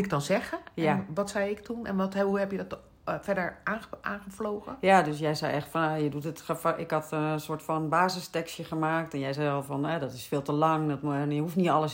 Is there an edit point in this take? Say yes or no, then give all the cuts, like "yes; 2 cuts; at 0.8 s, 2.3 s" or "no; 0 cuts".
no; 0 cuts